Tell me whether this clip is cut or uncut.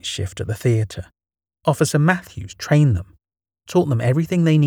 uncut